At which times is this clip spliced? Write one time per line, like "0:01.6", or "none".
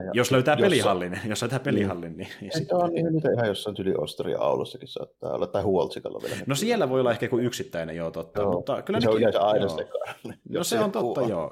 none